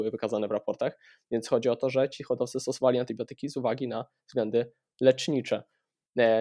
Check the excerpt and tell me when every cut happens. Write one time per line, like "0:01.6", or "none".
none